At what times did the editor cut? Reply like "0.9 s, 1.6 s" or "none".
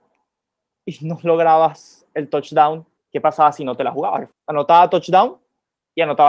3.0 s, 4.3 s